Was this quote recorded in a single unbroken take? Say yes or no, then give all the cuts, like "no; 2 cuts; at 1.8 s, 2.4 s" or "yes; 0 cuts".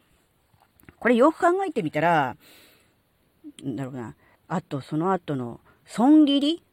no; 1 cut; at 4.4 s